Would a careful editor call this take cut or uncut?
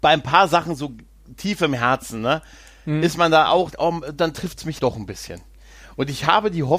cut